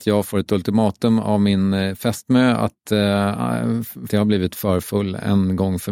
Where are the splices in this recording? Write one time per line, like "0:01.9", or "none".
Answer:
0:04.1